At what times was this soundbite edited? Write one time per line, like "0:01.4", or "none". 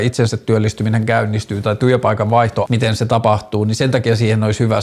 0:02.6